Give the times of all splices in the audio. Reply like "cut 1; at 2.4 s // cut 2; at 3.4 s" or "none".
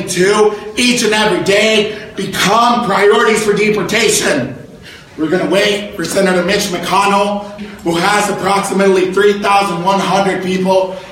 cut 1; at 5.1 s // cut 2; at 7.6 s